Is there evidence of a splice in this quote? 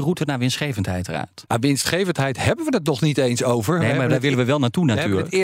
no; 0 cuts

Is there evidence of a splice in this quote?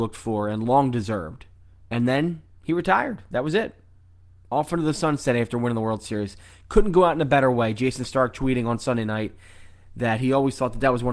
no; 0 cuts

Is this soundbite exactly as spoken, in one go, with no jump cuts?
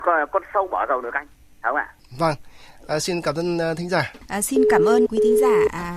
no; 1 cut; at 5.0 s

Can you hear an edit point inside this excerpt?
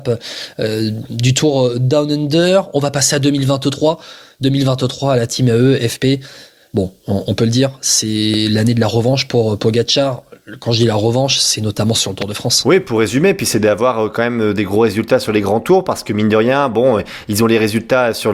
no; 0 cuts

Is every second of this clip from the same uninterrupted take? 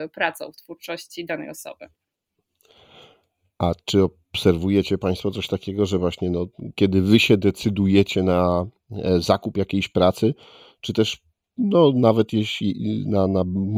yes; 0 cuts

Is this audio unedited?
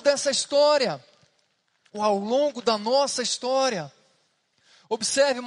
yes; 0 cuts

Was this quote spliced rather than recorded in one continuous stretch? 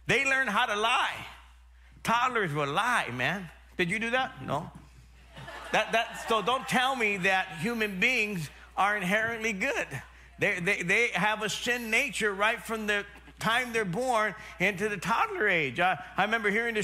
yes; 1 cut; at 10.8 s

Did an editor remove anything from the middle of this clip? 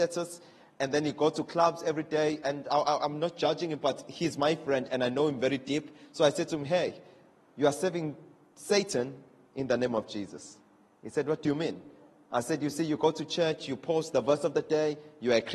no; 0 cuts

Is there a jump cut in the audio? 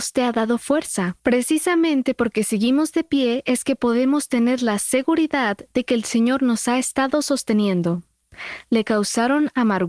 yes; 2 cuts; at 1.2 s, 8.6 s

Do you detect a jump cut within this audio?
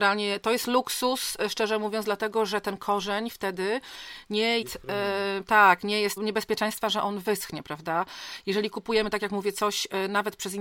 yes; 2 cuts; at 4.6 s, 6.2 s

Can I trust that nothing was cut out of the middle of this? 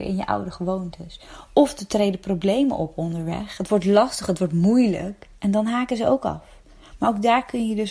yes; 0 cuts

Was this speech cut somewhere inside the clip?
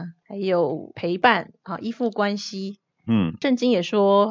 yes; 1 cut; at 3.0 s

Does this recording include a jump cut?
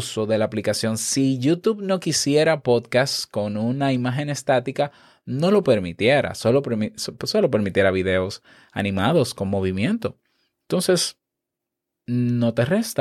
no; 0 cuts

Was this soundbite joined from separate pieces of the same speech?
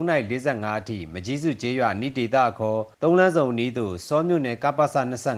yes; 1 cut; at 2.9 s

